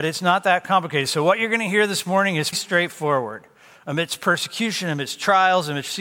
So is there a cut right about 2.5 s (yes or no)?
yes